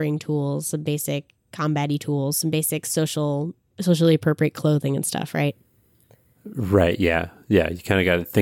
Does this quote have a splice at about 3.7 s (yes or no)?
yes